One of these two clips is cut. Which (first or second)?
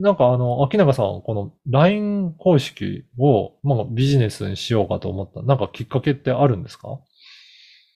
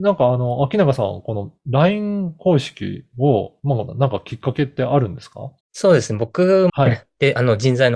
second